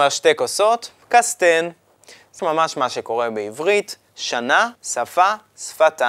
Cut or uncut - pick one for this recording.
cut